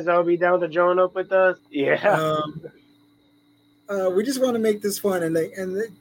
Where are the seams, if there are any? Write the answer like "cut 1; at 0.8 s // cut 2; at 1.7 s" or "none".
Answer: cut 1; at 1.6 s